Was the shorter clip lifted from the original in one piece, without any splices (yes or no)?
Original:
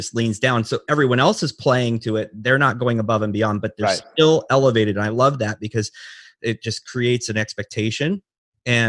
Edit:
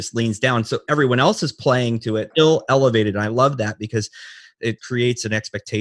no